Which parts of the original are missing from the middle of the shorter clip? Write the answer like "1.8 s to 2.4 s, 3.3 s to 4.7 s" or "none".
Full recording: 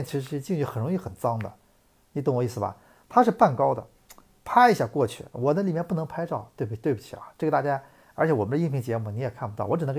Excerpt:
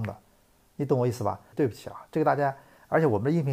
2.9 s to 6.8 s